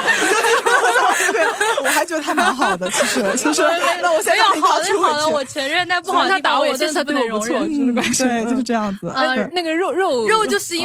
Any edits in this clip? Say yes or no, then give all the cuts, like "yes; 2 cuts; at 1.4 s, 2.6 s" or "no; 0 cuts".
no; 0 cuts